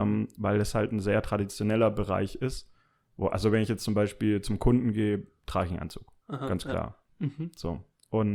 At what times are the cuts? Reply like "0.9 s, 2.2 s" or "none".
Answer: 7.1 s